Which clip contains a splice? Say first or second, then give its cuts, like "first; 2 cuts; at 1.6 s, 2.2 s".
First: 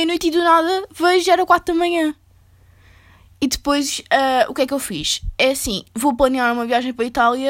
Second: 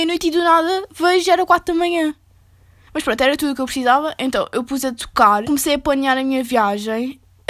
second; 2 cuts; at 2.9 s, 5.4 s